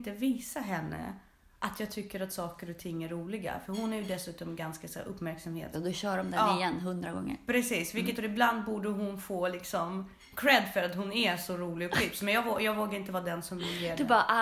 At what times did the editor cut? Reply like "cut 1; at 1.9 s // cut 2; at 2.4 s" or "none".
cut 1; at 5.7 s // cut 2; at 8.1 s